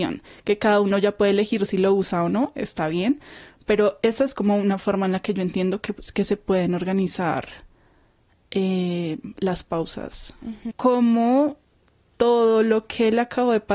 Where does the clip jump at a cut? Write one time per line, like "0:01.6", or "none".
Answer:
0:10.7